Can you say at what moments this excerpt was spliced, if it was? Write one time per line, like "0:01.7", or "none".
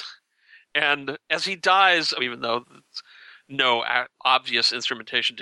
0:02.2